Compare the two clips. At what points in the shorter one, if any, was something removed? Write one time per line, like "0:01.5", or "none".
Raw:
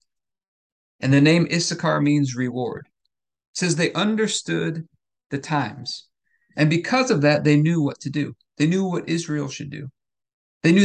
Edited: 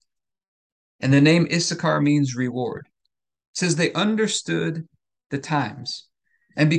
none